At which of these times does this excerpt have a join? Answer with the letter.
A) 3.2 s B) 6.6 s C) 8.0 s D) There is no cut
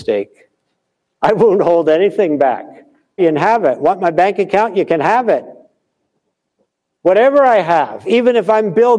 A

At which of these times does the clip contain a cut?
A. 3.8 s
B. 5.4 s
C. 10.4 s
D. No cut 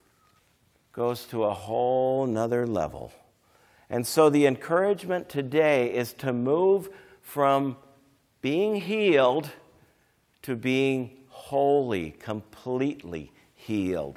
D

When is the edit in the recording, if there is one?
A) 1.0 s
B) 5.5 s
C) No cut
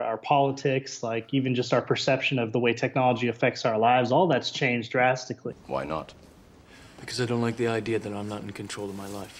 B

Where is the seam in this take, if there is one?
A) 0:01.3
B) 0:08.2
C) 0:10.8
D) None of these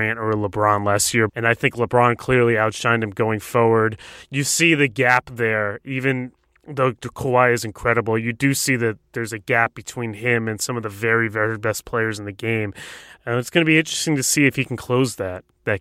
A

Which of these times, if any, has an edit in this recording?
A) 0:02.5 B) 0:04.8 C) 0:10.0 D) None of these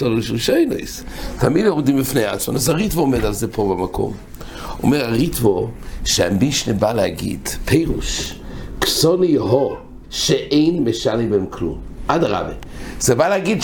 C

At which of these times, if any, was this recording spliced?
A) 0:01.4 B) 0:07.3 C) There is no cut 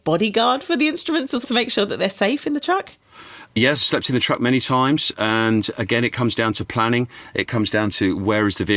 A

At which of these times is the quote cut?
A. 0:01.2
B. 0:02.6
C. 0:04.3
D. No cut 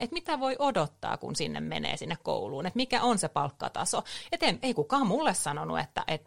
D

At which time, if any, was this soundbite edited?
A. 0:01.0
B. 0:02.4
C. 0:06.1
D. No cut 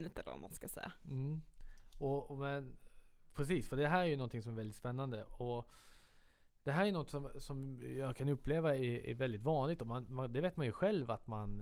D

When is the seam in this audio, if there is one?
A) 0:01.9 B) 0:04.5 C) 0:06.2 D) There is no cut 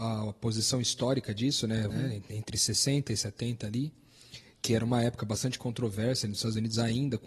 A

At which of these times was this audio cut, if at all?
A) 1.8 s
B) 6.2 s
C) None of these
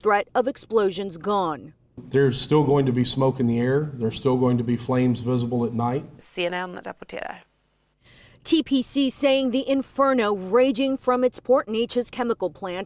B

